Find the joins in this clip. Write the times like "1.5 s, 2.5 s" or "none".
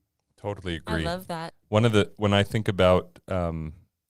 1.5 s